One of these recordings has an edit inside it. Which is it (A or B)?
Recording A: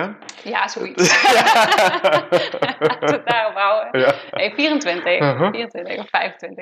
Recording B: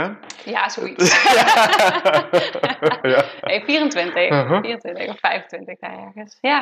B